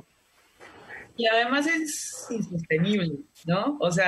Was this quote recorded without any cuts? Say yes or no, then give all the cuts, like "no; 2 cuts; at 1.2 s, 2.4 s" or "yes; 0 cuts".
yes; 0 cuts